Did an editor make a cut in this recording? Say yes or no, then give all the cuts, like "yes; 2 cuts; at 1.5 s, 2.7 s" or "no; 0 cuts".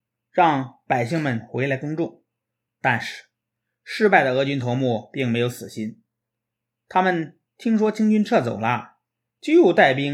yes; 1 cut; at 2.7 s